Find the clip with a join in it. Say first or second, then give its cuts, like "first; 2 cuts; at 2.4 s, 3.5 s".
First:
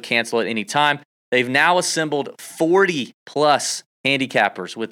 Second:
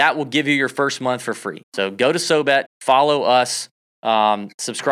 second; 2 cuts; at 1.6 s, 2.7 s